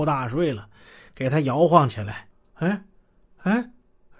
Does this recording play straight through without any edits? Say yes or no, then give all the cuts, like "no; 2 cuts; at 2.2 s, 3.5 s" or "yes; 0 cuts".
no; 1 cut; at 2.5 s